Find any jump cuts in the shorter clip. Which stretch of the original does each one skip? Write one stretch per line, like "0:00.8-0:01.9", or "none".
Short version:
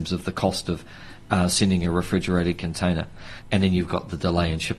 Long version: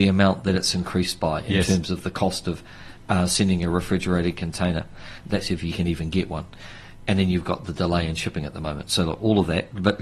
0:05.2-0:07.0